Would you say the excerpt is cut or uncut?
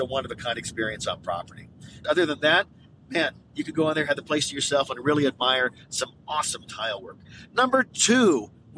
cut